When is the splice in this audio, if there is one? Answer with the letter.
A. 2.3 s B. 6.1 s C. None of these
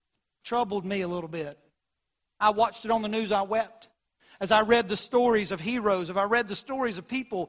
C